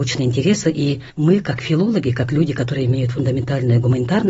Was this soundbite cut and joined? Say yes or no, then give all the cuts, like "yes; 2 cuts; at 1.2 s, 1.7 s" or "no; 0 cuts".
no; 0 cuts